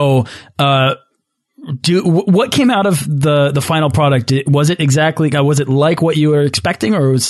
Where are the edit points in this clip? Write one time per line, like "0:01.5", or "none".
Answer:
none